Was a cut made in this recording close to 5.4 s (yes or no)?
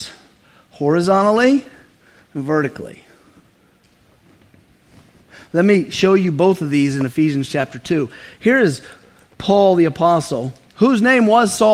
no